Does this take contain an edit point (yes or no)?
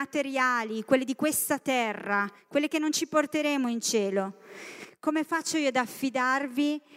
no